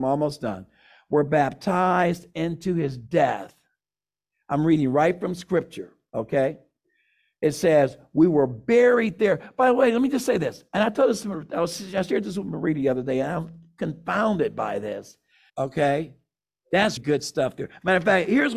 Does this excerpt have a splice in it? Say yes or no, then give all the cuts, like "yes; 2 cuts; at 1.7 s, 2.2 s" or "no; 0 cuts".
yes; 2 cuts; at 15.5 s, 17.0 s